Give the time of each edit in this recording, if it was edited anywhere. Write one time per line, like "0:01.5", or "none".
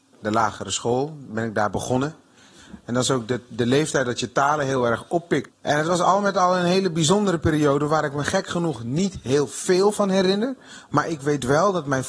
0:05.5